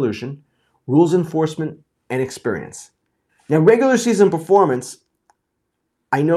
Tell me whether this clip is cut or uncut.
cut